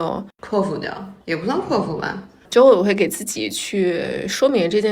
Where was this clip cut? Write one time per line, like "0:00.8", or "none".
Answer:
0:01.2
0:02.4